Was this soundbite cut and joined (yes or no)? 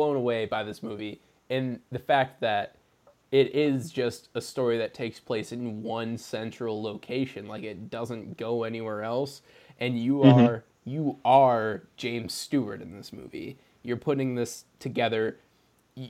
no